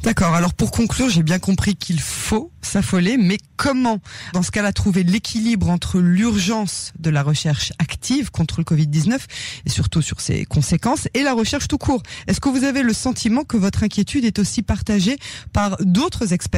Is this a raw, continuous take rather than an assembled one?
no; 1 cut; at 4.3 s

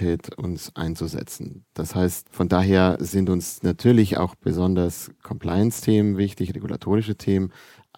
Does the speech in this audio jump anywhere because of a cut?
no; 0 cuts

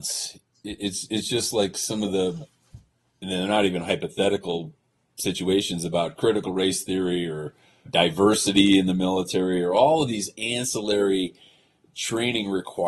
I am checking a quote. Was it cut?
yes; 1 cut; at 7.9 s

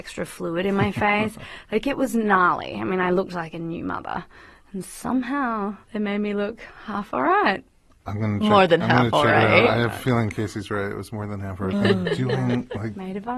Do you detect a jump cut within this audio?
yes; 2 cuts; at 5.8 s, 11.7 s

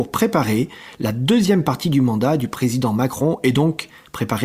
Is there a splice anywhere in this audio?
no; 0 cuts

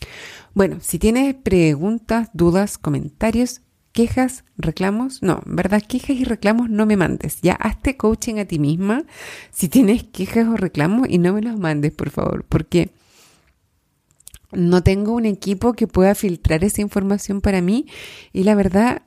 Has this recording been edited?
no; 0 cuts

